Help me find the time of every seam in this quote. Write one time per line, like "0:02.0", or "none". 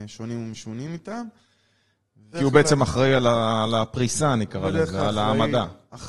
0:02.3